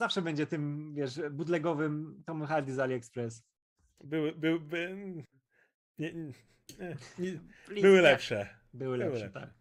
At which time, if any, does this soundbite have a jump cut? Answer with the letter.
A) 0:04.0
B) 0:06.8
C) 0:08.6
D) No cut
A